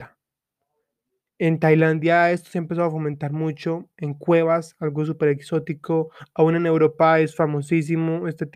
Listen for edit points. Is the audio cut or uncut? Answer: uncut